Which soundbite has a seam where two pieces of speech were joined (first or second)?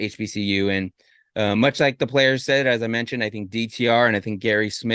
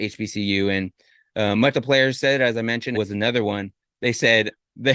second